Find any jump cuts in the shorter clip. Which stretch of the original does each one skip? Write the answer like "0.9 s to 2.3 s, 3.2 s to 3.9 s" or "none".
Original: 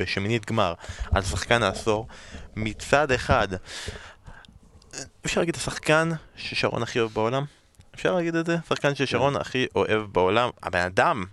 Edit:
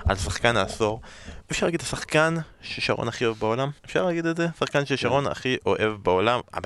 2.5 s to 5.2 s, 7.5 s to 7.9 s

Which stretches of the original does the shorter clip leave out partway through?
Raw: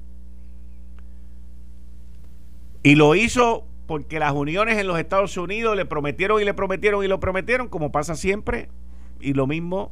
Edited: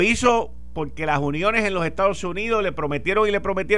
none

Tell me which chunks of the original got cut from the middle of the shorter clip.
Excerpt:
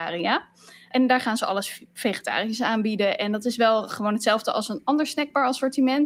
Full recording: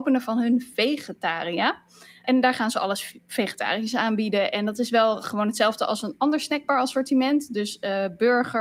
none

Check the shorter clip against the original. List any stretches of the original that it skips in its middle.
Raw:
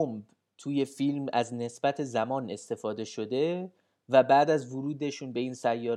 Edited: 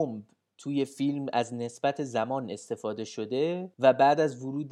3.7 s to 4.0 s

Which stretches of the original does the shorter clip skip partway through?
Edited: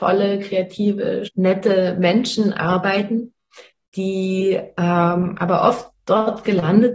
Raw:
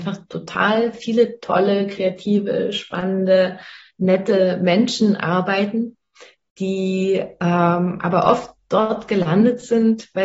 2.7 s to 3.9 s

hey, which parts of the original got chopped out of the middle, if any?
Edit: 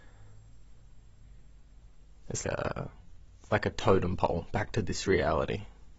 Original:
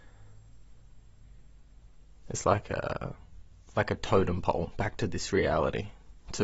2.4 s to 2.7 s

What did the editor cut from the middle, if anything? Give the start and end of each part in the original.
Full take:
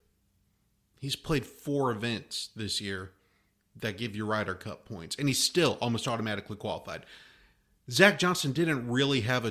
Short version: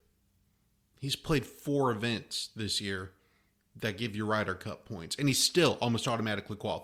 none

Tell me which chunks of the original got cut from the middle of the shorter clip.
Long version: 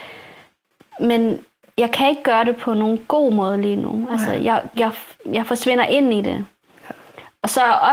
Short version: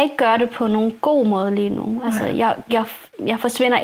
none

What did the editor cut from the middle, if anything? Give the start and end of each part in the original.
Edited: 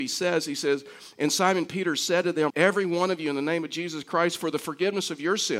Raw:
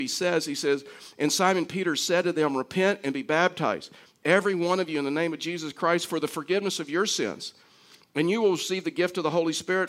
2.5 s to 4.2 s

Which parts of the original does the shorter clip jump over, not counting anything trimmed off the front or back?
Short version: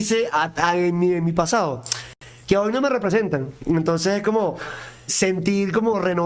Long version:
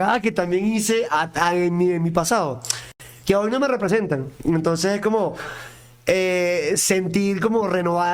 5.9 s to 6.8 s

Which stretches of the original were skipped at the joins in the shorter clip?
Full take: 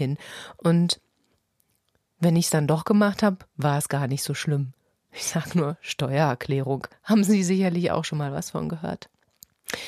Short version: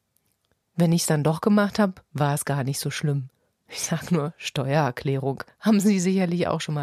none

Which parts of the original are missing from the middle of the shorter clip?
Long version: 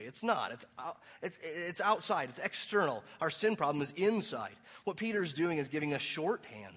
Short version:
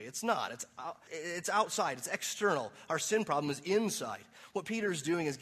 1.1 s to 1.4 s

